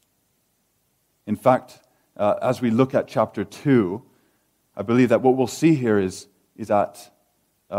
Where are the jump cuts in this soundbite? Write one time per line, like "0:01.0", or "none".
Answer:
0:06.7